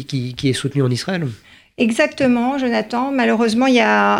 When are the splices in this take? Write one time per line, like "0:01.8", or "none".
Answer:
none